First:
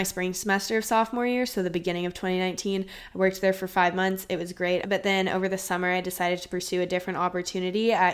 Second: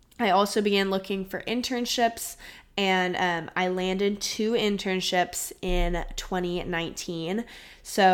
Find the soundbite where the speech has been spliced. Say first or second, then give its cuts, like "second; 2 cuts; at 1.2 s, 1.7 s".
first; 1 cut; at 4.8 s